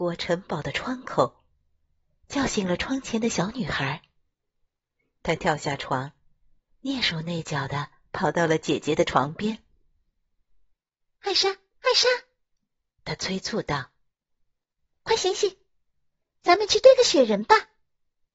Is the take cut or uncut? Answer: uncut